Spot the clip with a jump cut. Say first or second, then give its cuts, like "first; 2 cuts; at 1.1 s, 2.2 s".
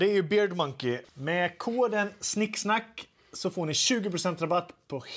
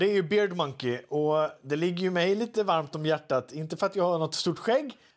first; 1 cut; at 1.0 s